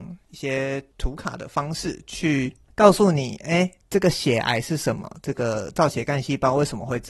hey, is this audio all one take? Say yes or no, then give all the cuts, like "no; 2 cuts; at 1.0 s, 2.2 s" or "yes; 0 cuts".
yes; 0 cuts